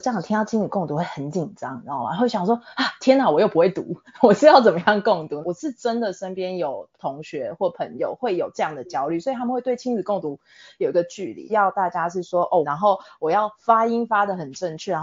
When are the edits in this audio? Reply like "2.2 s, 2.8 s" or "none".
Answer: 5.4 s, 11.5 s, 12.6 s